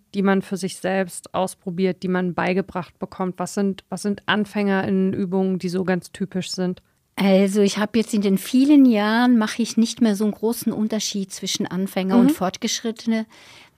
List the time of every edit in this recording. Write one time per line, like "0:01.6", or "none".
none